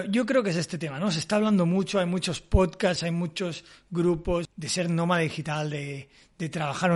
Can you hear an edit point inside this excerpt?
yes; 2 cuts; at 3.0 s, 4.5 s

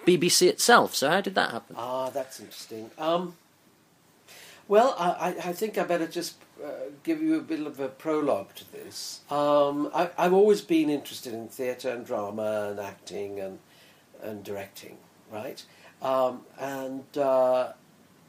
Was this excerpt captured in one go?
no; 1 cut; at 9.2 s

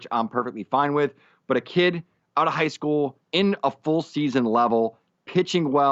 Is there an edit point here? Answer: yes; 1 cut; at 3.2 s

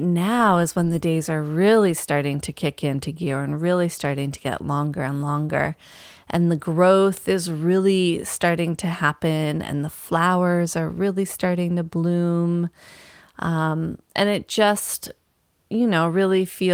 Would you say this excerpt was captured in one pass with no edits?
yes; 0 cuts

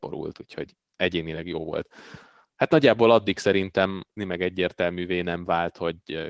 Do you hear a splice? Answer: yes; 2 cuts; at 2.4 s, 4.2 s

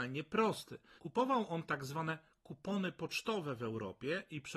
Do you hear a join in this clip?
yes; 1 cut; at 1.0 s

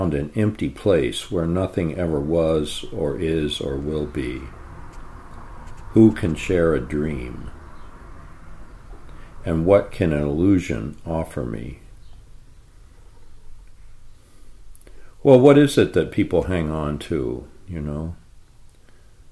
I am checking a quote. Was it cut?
no; 0 cuts

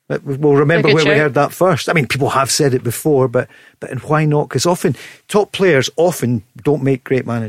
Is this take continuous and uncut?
yes; 0 cuts

